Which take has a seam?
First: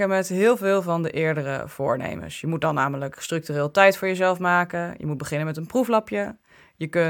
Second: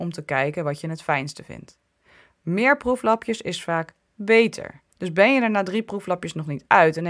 second; 1 cut; at 4.9 s

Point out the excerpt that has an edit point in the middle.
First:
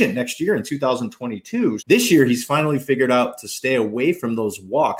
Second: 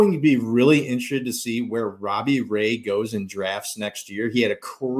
first; 1 cut; at 1.8 s

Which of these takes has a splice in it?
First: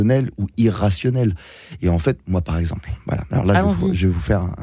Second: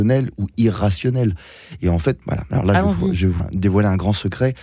second; 2 cuts; at 2.2 s, 3.4 s

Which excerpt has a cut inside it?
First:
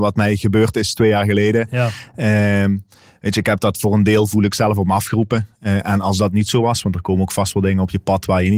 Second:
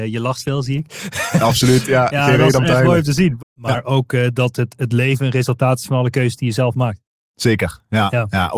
second; 1 cut; at 3.4 s

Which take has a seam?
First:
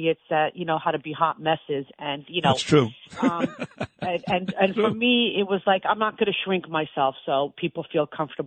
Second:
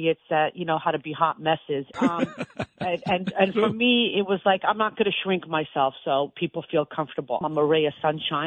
second; 2 cuts; at 1.9 s, 7.4 s

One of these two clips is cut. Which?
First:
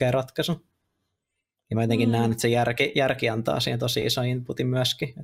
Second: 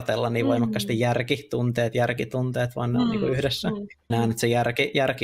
second; 1 cut; at 4.1 s

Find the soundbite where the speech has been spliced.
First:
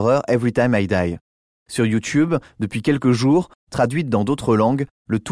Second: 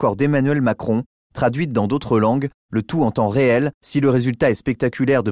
first; 2 cuts; at 1.5 s, 3.5 s

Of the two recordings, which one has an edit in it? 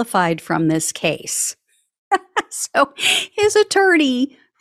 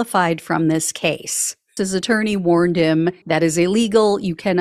second; 2 cuts; at 1.8 s, 3.2 s

